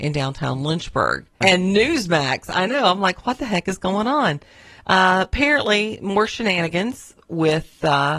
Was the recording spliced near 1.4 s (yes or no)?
yes